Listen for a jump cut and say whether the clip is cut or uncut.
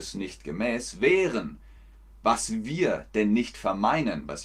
uncut